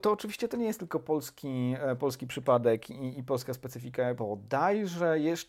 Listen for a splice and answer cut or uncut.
cut